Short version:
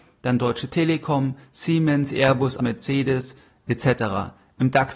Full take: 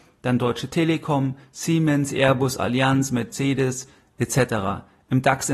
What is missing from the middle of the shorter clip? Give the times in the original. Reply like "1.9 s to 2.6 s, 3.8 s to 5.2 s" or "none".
2.6 s to 3.1 s

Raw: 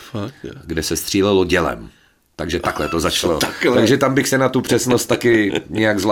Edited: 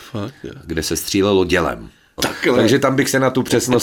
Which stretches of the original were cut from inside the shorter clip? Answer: 2.2 s to 3.4 s

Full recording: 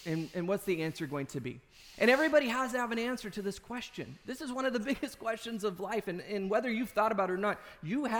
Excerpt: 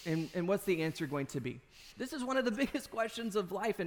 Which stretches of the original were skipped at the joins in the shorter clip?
1.9 s to 4.2 s

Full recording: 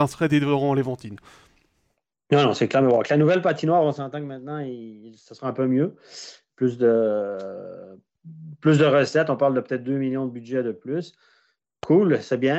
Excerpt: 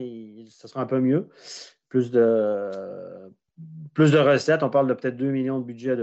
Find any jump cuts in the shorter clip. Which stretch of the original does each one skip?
none

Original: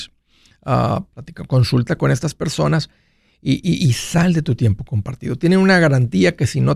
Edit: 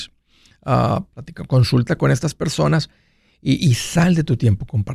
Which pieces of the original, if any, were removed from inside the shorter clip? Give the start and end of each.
3.6 s to 3.8 s

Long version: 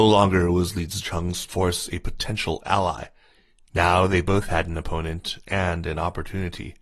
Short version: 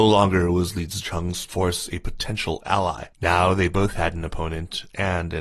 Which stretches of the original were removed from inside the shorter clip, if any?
3.1 s to 3.7 s

